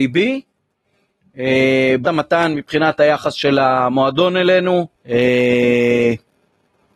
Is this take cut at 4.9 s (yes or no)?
yes